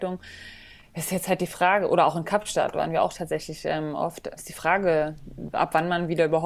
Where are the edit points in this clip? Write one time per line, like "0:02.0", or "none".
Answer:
0:04.4
0:05.5